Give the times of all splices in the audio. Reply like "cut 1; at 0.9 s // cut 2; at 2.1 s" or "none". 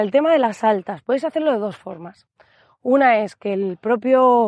none